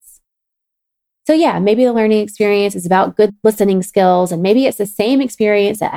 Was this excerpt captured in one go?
no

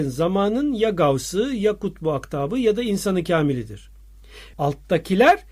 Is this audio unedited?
no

